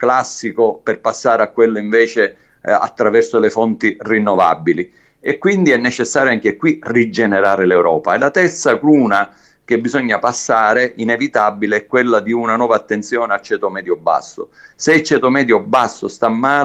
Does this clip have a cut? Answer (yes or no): yes